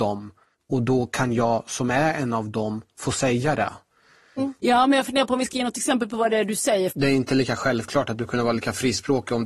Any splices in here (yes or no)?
yes